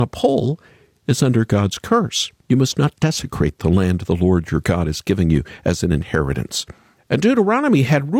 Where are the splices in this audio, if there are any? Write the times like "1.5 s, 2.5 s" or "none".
2.4 s, 7.0 s